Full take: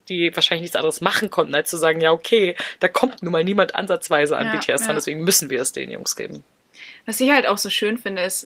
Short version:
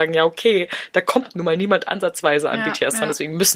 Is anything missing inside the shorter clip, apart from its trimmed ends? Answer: no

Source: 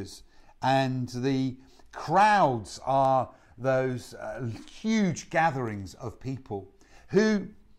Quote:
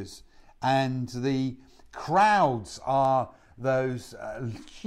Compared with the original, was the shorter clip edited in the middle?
no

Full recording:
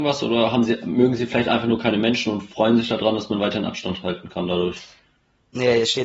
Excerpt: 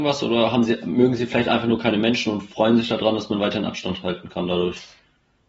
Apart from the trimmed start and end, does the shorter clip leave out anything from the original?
no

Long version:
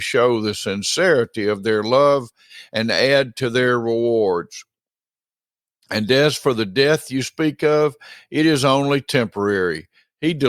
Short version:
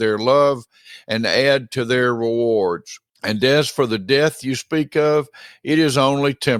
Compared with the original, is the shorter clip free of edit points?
no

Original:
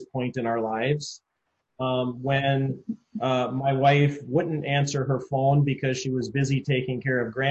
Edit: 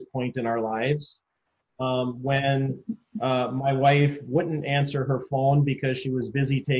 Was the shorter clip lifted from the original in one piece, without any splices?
yes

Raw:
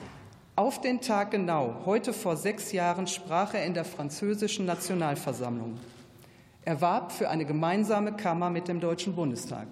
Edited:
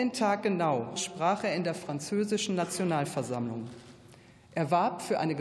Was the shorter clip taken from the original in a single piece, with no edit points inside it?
no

